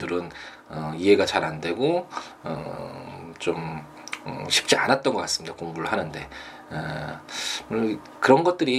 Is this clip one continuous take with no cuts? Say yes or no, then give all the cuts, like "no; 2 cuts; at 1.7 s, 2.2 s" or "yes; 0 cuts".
yes; 0 cuts